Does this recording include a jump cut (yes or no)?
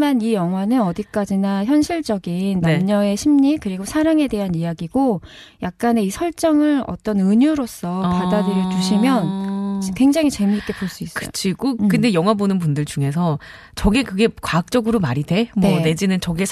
no